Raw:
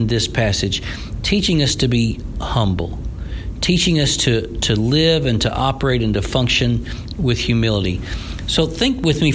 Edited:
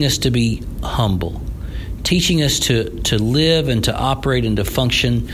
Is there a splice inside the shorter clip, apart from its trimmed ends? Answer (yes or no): no